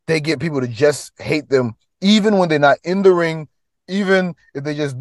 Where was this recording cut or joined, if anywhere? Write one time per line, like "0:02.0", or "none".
none